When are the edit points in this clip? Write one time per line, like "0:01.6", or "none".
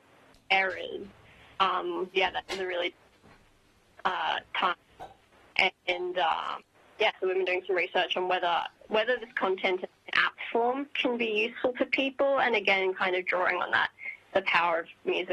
0:02.1